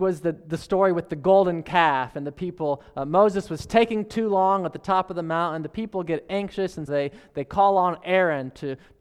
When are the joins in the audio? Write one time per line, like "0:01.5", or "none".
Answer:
0:06.9